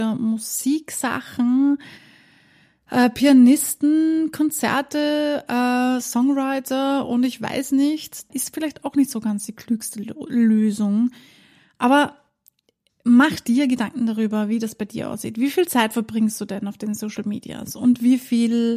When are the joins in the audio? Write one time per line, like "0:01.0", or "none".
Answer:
0:08.3